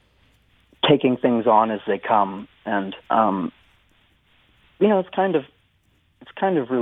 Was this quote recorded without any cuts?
no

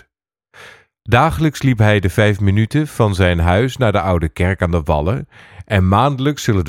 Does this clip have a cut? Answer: no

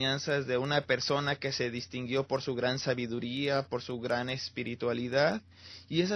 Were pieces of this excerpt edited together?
no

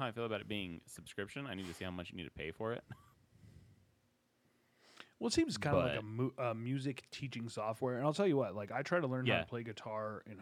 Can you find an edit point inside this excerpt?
no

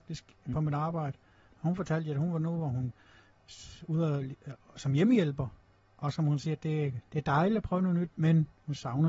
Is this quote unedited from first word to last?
yes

